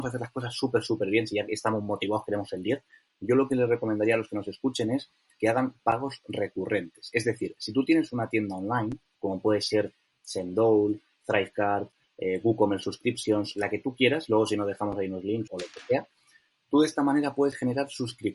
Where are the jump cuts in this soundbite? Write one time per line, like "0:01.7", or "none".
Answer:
0:15.5